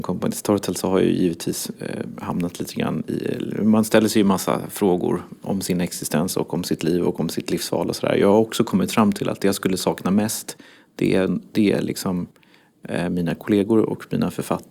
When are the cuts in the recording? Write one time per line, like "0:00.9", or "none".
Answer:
none